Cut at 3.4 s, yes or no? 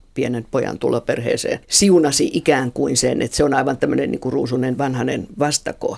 no